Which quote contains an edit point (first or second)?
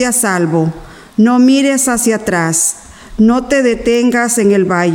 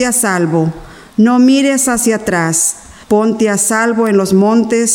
second